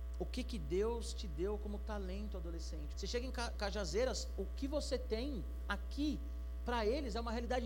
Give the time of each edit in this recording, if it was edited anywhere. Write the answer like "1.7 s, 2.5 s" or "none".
2.9 s